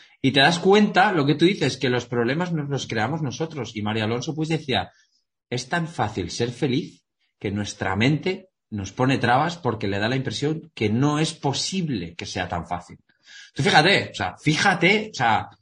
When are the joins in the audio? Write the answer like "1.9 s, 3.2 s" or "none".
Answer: none